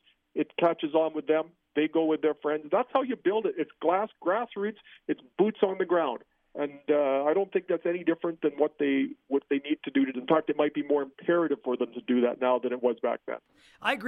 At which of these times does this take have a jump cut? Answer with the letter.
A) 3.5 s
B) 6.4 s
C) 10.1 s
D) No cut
C